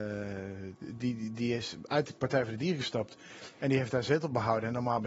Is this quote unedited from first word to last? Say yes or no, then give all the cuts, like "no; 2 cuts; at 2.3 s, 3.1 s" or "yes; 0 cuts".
yes; 0 cuts